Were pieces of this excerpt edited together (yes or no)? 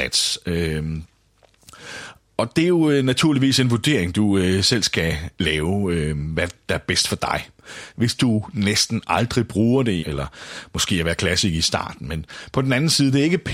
yes